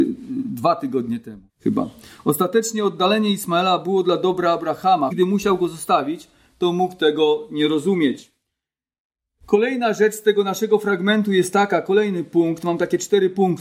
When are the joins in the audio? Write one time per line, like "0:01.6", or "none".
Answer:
0:01.5
0:05.1